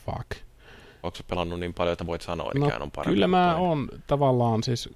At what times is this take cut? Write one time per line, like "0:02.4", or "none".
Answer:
0:01.0
0:02.5